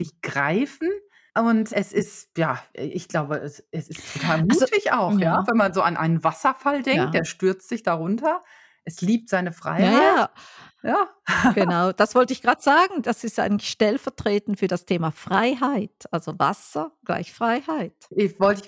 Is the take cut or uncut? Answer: cut